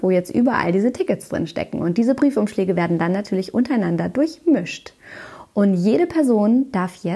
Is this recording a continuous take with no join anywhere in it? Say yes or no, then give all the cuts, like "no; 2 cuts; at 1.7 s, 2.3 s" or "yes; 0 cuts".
yes; 0 cuts